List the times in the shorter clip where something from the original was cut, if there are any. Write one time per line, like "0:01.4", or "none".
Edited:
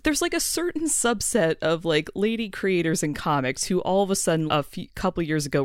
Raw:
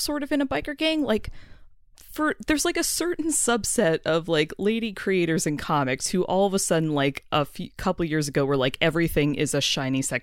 0:04.5